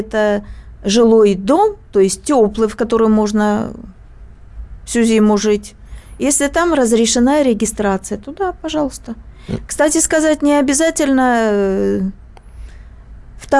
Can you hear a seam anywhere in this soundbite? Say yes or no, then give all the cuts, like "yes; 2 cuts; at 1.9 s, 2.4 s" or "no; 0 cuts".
no; 0 cuts